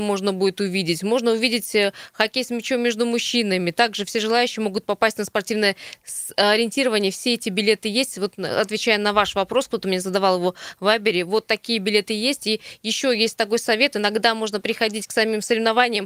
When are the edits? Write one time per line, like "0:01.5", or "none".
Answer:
none